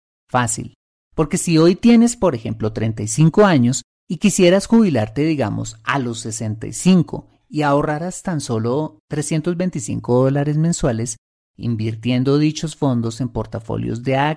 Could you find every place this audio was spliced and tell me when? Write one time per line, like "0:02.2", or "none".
none